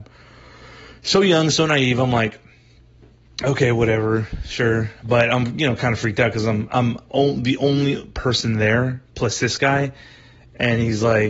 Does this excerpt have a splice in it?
no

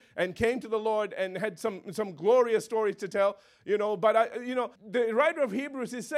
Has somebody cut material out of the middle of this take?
yes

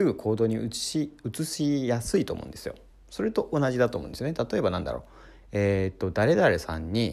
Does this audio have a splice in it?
no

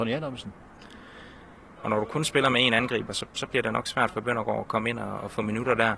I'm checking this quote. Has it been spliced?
yes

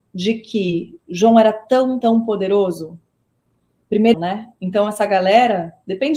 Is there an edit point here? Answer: yes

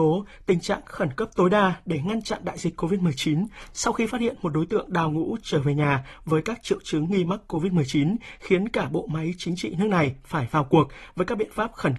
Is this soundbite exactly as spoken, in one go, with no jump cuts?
yes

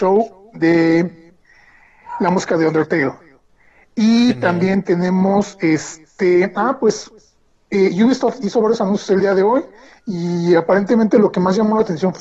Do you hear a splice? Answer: no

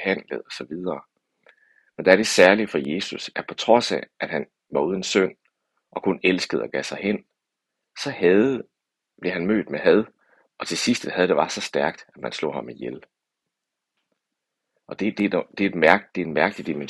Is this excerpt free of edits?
yes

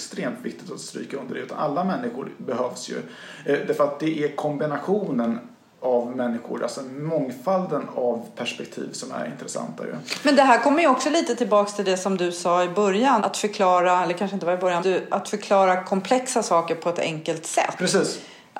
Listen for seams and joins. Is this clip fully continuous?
no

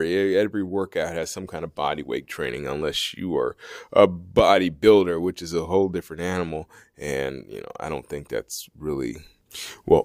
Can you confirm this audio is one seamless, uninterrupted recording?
yes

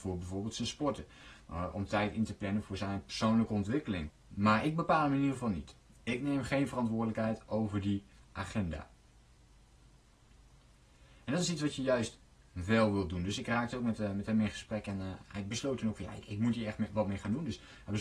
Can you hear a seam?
yes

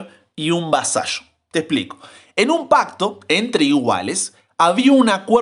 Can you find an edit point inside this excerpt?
no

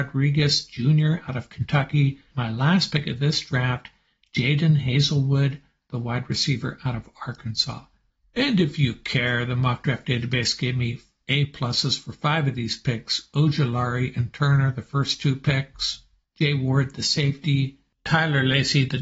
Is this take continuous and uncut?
no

